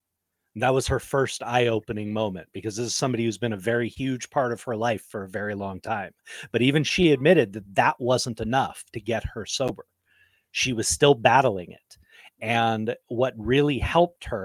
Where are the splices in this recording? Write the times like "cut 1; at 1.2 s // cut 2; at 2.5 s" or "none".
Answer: none